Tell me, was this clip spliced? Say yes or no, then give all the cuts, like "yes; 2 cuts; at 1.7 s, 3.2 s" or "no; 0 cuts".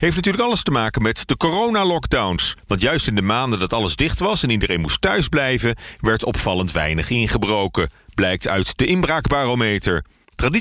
no; 0 cuts